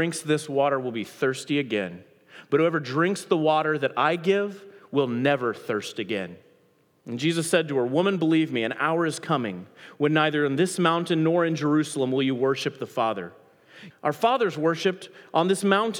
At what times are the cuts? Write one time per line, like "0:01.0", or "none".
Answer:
0:07.0
0:13.9